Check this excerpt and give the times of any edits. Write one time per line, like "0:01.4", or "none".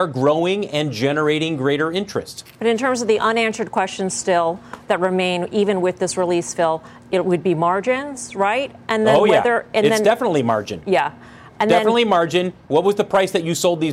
none